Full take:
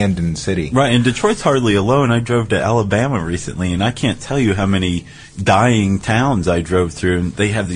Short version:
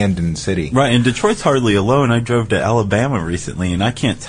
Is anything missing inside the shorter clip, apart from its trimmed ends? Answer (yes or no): no